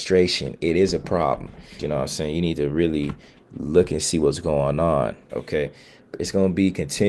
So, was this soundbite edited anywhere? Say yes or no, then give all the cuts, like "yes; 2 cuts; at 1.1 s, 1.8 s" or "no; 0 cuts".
yes; 2 cuts; at 1.8 s, 5.3 s